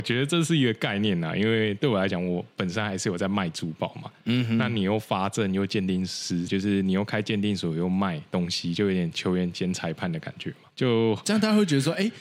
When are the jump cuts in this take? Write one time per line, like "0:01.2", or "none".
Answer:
0:06.5
0:10.7